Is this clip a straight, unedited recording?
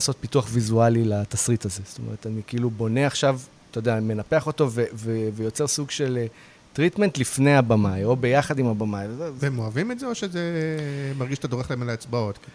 yes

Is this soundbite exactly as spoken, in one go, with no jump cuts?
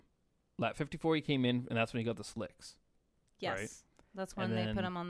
yes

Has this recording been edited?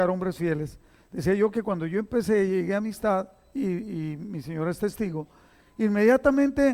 no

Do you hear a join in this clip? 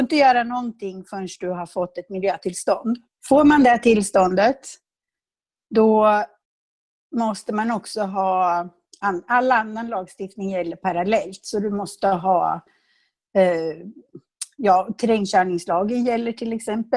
yes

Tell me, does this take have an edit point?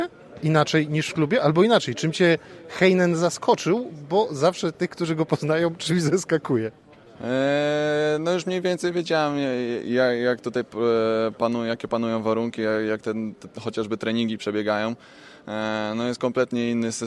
no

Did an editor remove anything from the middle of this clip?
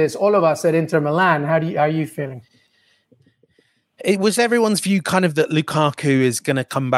no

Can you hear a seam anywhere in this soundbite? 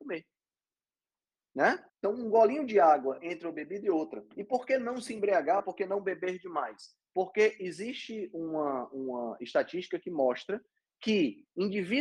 yes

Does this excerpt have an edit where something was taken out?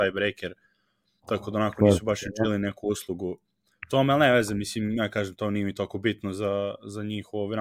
no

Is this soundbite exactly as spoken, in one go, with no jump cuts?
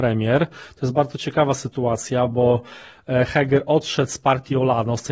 yes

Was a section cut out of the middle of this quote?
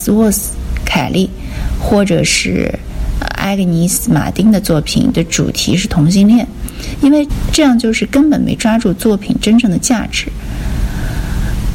no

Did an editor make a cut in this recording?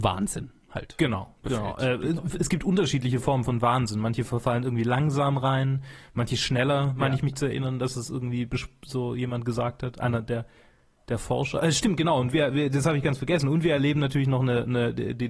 no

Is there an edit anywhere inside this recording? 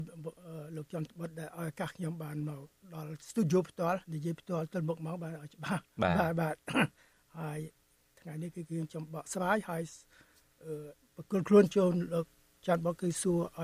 yes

